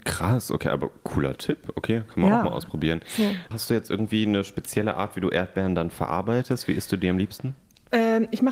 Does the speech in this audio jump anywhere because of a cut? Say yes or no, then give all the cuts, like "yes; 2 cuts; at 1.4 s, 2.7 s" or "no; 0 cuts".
yes; 1 cut; at 3.5 s